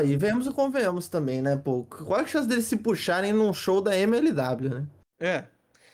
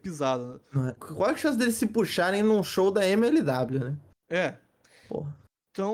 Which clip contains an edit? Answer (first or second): second